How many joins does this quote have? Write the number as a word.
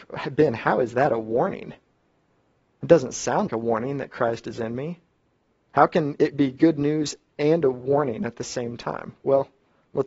one